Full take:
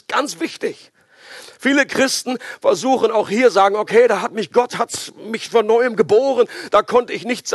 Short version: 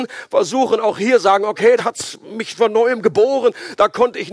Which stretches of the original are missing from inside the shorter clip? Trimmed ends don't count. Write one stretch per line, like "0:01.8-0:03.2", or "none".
0:04.1-0:04.7